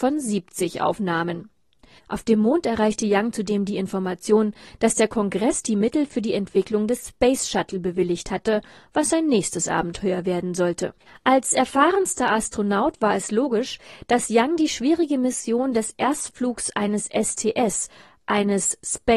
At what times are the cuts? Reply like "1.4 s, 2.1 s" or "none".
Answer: 2.0 s, 11.1 s